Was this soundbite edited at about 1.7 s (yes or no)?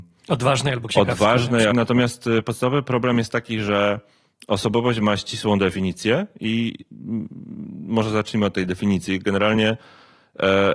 yes